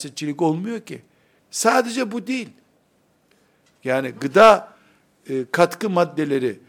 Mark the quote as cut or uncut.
cut